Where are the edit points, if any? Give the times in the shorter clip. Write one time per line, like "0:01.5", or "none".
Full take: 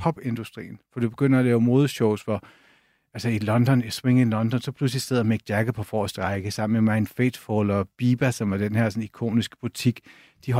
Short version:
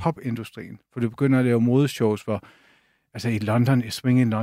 none